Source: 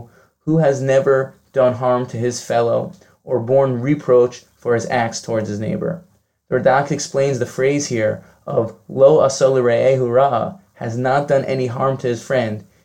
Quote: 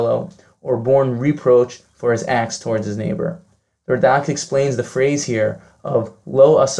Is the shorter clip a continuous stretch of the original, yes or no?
yes